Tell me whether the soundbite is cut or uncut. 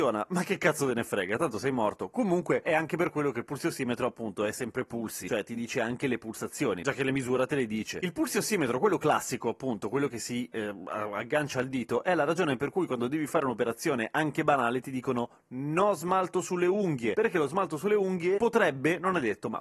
uncut